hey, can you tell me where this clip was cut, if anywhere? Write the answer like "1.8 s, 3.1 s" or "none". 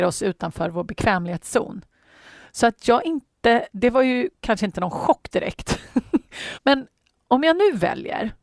3.7 s, 6.5 s